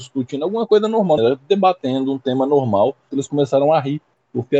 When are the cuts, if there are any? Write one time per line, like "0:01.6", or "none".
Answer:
0:01.2
0:03.1

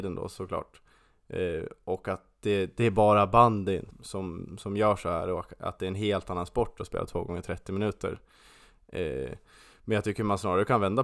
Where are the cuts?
0:03.9

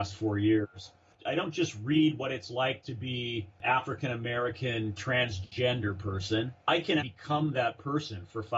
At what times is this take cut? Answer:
0:01.1
0:07.0

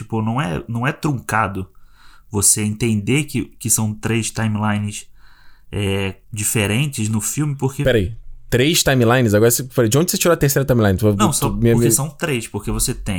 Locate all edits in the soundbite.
0:06.2

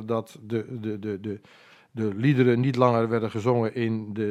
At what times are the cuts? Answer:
none

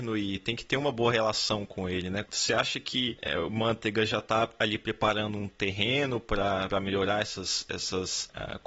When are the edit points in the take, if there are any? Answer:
none

